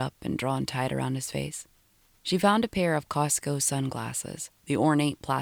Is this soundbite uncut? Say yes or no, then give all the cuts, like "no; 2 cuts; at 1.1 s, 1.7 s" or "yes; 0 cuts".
yes; 0 cuts